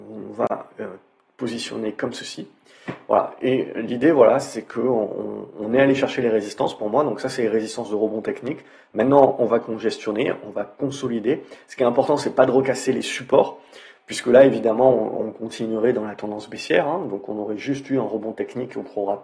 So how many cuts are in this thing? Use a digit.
0